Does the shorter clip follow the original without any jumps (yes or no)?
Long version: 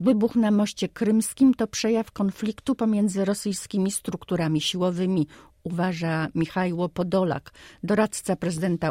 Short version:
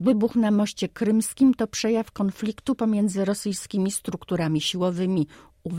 yes